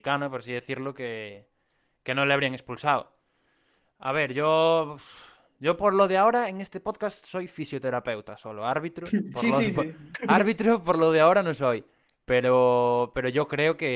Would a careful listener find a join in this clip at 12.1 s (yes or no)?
no